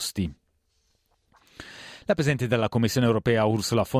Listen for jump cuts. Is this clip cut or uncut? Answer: cut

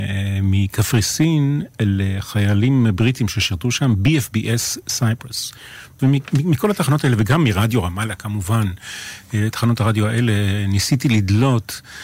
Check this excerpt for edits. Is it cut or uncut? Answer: cut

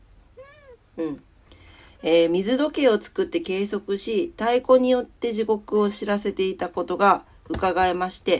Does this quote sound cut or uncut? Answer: uncut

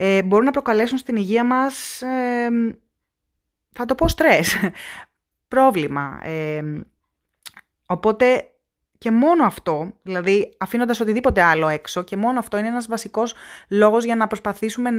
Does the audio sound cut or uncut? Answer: uncut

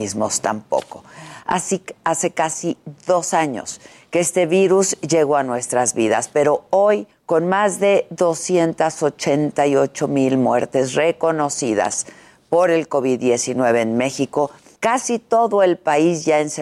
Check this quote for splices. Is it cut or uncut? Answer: uncut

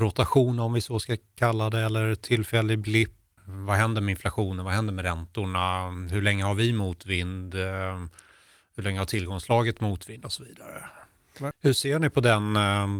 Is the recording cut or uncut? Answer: cut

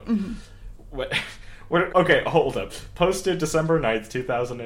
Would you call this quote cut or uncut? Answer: cut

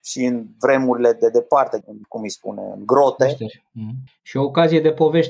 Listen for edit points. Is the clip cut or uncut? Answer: cut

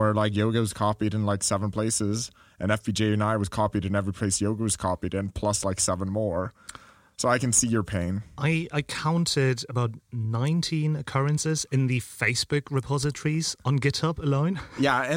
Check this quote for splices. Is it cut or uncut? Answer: uncut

